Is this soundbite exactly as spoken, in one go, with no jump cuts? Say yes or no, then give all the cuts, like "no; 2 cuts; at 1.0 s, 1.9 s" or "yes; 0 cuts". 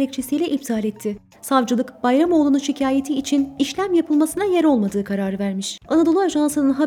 no; 2 cuts; at 1.3 s, 5.8 s